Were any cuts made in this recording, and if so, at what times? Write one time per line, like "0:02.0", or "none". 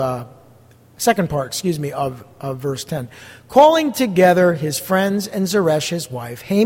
none